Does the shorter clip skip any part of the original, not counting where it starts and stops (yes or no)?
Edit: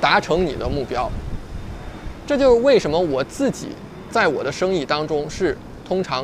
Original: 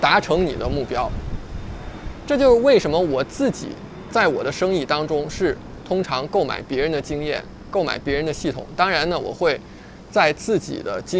no